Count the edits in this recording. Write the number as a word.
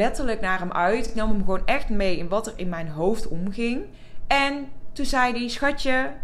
zero